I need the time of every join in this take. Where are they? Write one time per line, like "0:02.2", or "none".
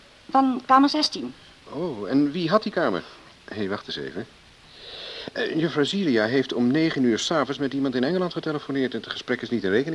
0:03.3